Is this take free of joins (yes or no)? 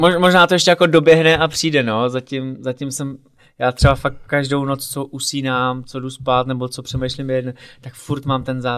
yes